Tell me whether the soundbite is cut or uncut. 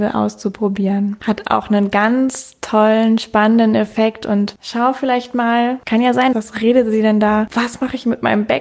cut